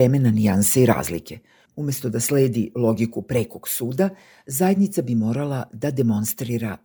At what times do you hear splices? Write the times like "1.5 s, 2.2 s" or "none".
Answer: 1.6 s